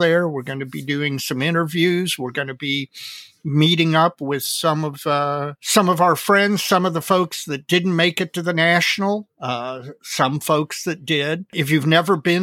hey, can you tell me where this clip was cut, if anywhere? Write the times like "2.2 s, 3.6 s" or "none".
none